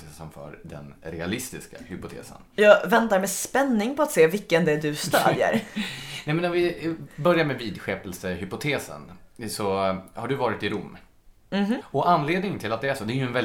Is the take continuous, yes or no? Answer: no